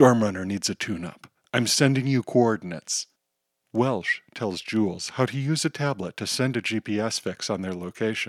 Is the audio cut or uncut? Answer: uncut